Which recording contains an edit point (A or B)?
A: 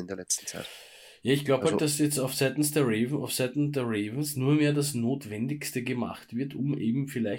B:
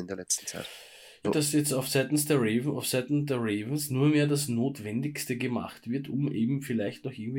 B